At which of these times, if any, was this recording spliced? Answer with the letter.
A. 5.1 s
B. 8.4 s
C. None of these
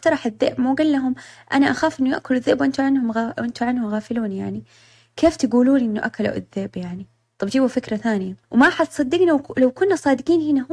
B